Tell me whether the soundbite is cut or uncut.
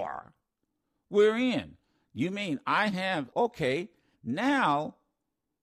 cut